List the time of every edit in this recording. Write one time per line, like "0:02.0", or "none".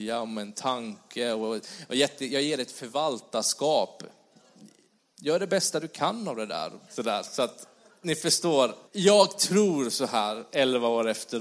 0:06.9
0:08.9